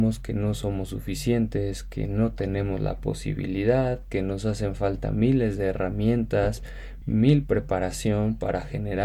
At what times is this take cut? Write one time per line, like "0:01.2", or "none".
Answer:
none